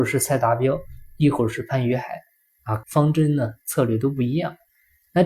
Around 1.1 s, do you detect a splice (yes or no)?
no